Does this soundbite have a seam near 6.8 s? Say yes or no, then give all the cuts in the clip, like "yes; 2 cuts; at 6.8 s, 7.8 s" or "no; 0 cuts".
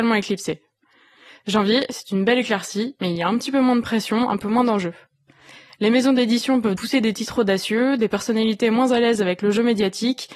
yes; 1 cut; at 6.8 s